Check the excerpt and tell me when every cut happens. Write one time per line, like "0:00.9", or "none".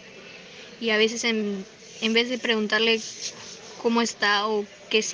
none